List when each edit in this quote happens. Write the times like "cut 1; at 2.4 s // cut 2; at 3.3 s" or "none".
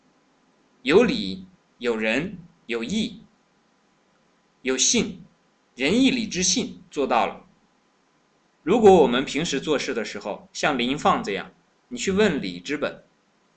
cut 1; at 8.4 s